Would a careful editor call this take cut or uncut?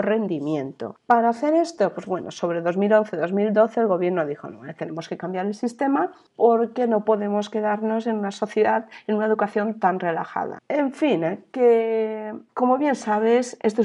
cut